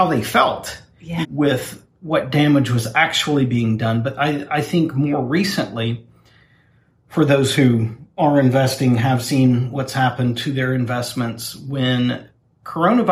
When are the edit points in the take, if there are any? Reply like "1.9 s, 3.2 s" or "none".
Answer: 1.2 s